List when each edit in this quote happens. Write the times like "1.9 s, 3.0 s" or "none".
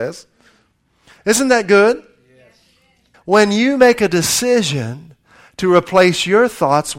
3.1 s